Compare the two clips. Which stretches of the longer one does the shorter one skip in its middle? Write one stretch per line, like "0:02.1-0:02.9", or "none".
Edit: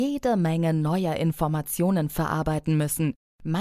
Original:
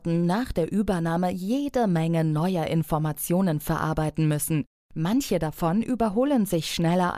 none